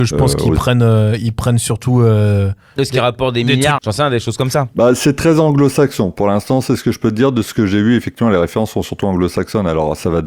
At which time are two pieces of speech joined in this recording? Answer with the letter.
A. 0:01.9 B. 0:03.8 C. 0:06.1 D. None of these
B